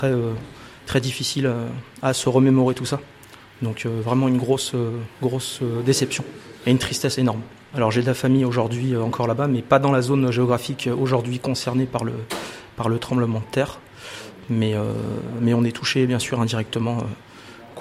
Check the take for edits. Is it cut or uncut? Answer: uncut